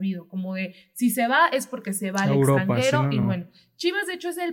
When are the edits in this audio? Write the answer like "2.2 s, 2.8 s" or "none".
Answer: none